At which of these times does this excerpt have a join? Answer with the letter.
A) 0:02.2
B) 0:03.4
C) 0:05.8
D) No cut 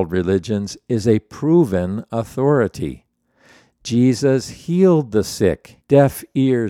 C